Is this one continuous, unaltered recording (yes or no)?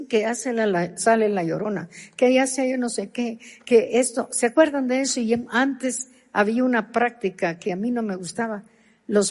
yes